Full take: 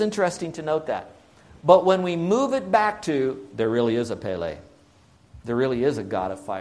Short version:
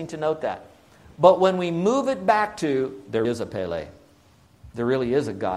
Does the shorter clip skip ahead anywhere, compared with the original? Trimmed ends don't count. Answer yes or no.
yes